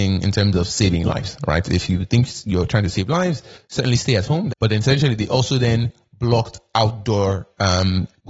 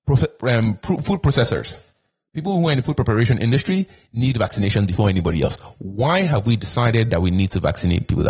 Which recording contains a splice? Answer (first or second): first